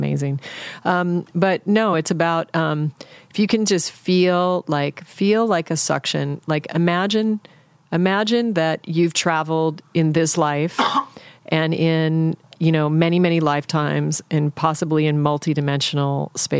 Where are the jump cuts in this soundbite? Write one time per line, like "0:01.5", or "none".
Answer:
none